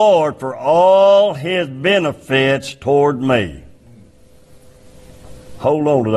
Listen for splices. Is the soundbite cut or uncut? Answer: uncut